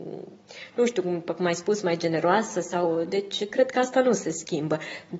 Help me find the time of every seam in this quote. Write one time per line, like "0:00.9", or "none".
none

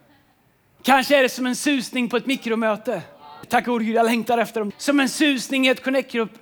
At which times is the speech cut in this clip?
0:03.4
0:04.7

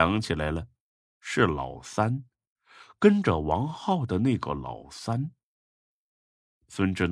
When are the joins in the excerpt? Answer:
none

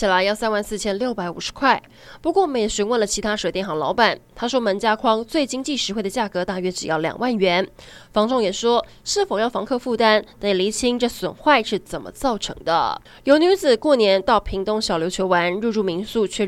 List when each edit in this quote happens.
none

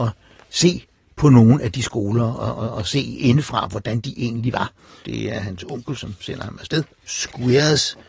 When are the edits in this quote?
0:05.0
0:07.0

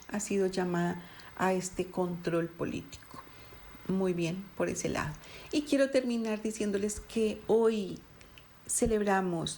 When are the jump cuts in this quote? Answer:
none

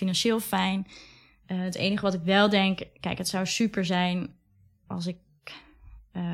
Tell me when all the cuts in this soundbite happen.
none

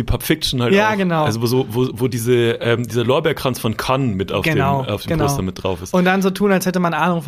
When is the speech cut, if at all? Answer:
none

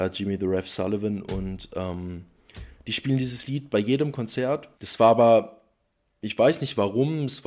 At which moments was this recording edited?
0:04.8

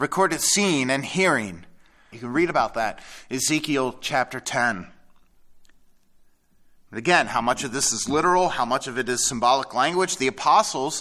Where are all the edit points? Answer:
0:02.1

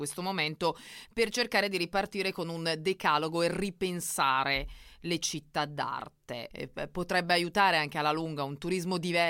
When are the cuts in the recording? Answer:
0:06.5

